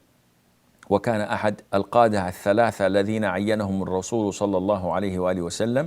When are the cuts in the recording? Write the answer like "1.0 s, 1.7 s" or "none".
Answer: 1.7 s